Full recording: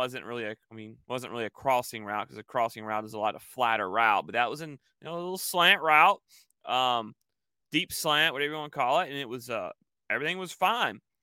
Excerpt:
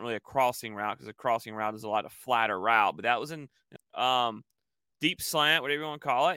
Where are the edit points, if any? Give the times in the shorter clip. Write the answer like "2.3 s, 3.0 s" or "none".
3.8 s